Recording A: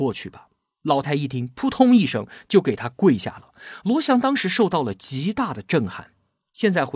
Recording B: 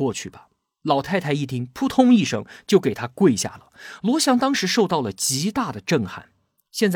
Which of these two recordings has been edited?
A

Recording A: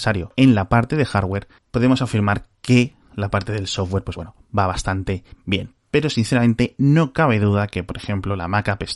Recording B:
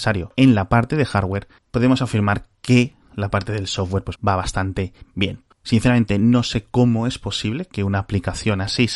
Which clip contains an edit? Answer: B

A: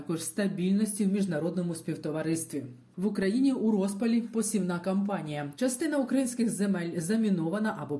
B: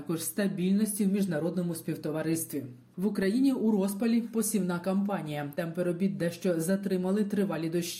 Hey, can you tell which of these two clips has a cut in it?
A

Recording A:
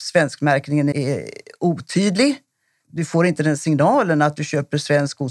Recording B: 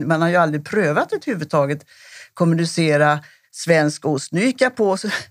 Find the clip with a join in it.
A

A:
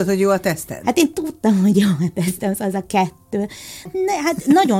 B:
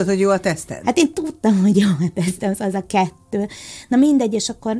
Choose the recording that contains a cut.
A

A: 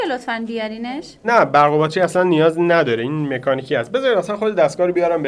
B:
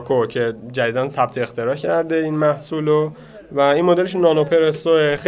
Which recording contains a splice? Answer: A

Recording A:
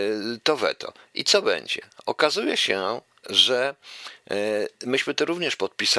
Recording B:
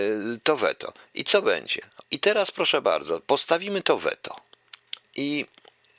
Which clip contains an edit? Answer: B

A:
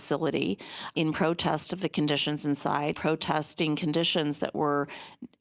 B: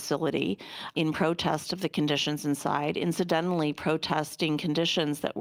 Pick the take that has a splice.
A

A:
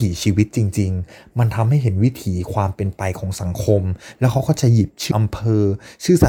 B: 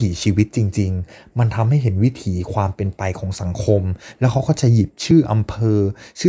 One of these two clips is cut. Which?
A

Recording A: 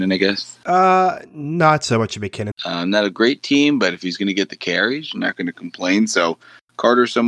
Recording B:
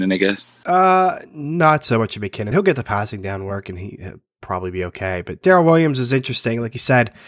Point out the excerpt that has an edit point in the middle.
A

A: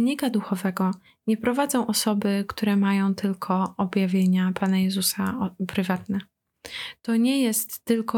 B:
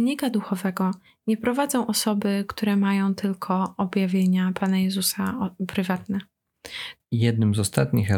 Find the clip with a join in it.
B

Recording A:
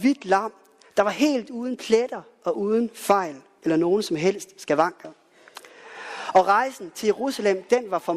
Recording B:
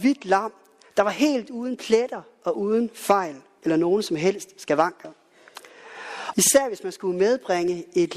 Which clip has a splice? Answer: B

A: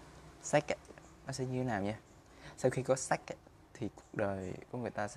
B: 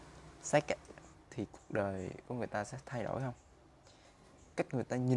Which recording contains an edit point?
B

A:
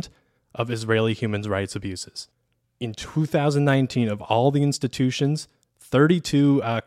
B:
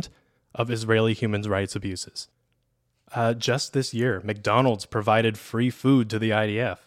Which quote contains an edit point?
A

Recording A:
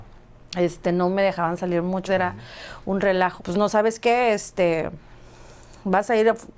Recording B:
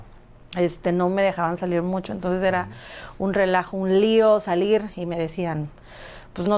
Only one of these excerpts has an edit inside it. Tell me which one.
A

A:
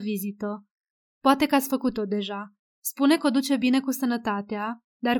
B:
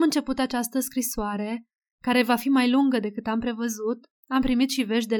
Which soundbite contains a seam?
A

